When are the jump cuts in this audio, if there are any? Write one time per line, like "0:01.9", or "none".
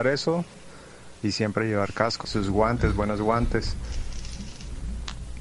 0:01.1
0:02.2